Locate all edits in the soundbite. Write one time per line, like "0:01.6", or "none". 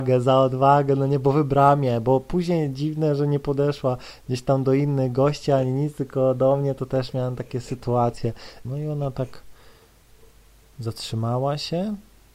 0:08.6